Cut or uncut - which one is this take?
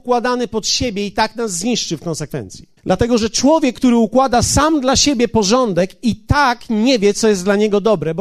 cut